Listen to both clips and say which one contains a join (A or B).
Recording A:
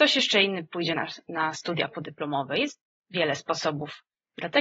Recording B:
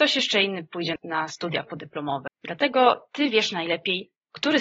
B